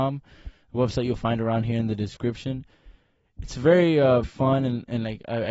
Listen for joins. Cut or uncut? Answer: cut